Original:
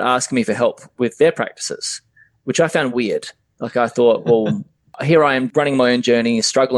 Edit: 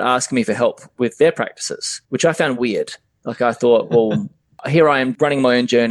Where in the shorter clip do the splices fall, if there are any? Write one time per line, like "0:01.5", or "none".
0:02.1